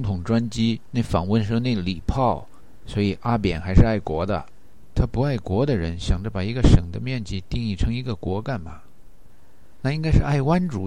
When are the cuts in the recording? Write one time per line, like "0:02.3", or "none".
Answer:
0:09.8